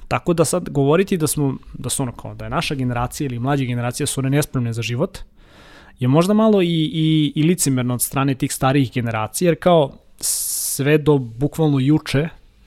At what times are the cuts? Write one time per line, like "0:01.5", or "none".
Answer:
none